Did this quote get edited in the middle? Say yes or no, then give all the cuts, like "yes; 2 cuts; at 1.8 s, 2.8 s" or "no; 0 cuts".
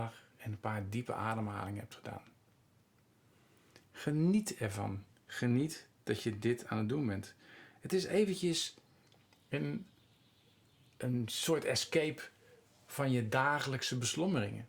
no; 0 cuts